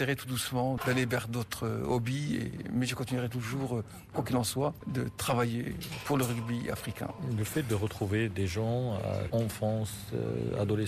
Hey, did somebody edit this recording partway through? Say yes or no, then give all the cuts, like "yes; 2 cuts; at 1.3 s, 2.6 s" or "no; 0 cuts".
yes; 1 cut; at 9.3 s